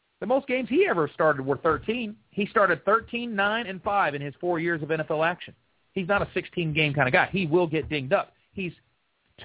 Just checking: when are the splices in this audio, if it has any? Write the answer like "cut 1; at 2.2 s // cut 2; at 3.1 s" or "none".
cut 1; at 3.6 s